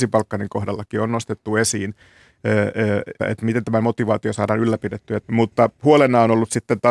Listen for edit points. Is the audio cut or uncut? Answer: cut